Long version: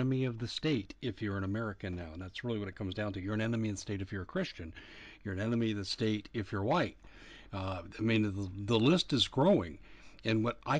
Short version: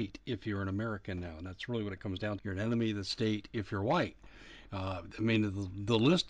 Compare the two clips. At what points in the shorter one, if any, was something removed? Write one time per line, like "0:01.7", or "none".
0:02.4